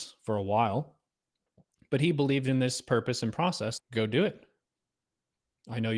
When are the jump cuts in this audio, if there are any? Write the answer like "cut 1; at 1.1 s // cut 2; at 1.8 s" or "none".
cut 1; at 3.8 s